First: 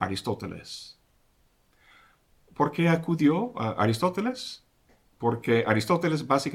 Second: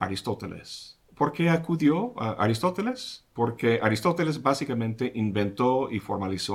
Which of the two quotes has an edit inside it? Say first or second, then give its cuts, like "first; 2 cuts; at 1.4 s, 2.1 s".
second; 2 cuts; at 1.0 s, 3.3 s